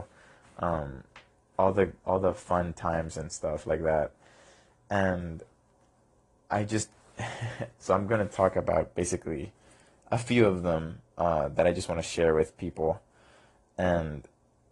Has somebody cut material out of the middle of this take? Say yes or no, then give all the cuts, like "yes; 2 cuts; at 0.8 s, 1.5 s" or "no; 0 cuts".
no; 0 cuts